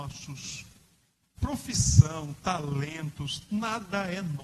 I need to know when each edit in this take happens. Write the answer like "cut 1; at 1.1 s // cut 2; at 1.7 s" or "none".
cut 1; at 1.2 s